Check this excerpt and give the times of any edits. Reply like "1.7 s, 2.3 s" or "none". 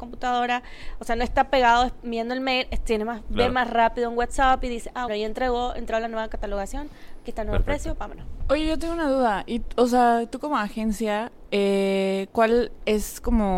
5.1 s